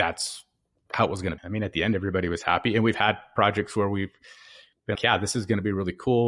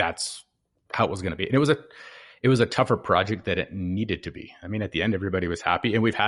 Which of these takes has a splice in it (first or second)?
first